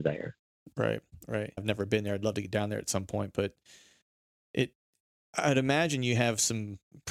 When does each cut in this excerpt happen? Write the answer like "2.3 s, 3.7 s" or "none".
1.6 s